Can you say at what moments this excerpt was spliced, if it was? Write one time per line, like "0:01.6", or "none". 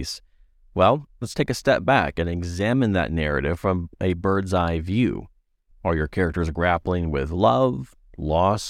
0:01.1
0:05.7

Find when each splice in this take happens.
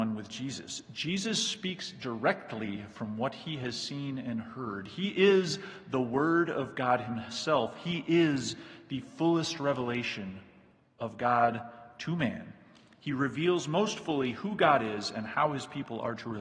none

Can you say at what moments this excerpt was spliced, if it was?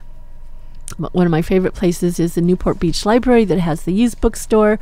0:01.0

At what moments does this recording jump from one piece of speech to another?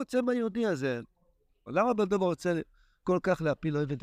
0:01.7

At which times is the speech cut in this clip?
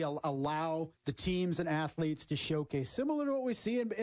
0:01.0

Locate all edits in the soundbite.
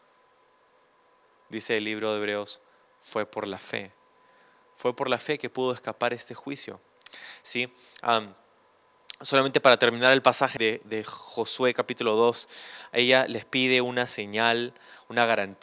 0:10.6

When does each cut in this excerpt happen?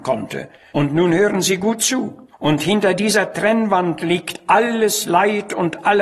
0:02.3

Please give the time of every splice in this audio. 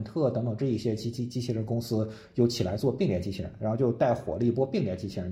none

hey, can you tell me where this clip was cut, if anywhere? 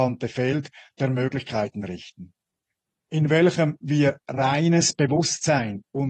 none

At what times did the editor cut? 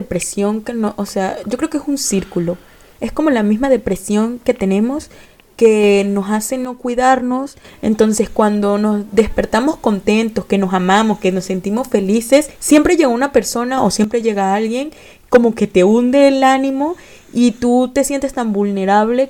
none

